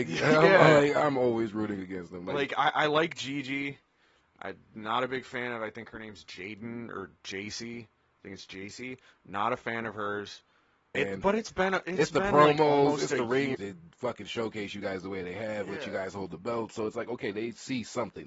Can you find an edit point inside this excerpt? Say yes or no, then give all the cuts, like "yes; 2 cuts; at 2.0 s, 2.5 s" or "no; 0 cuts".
yes; 2 cuts; at 10.9 s, 13.5 s